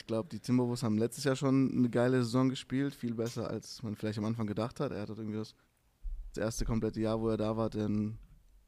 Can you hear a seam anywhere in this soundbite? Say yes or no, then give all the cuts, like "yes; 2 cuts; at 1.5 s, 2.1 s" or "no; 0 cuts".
no; 0 cuts